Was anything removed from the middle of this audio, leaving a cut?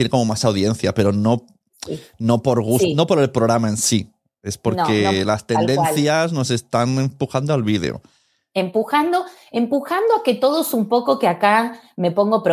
no; 0 cuts

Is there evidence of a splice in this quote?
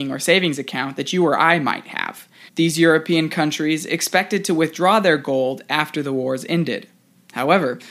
yes; 1 cut; at 2.5 s

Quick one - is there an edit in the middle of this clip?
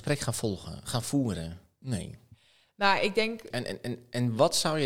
yes; 2 cuts; at 1.8 s, 3.5 s

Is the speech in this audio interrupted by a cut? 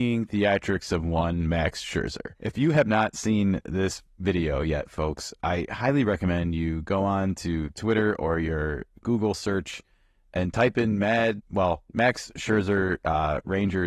no; 0 cuts

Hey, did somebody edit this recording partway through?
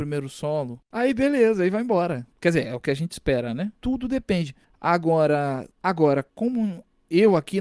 yes; 1 cut; at 6.3 s

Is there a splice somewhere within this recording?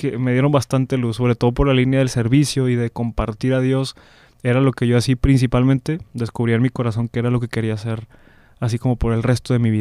no; 0 cuts

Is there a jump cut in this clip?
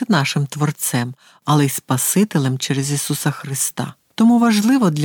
yes; 1 cut; at 4.0 s

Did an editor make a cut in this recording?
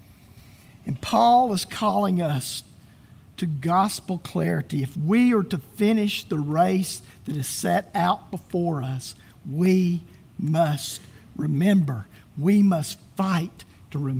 no; 0 cuts

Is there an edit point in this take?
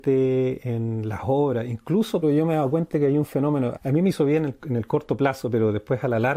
yes; 2 cuts; at 2.2 s, 3.7 s

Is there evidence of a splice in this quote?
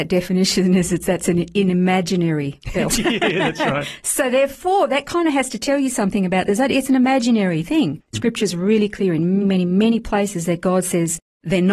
yes; 2 cuts; at 8.1 s, 9.4 s

